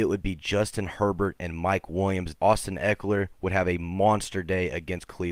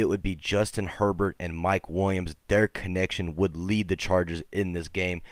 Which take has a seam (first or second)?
first